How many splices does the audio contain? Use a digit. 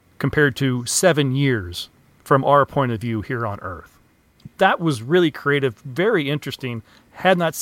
0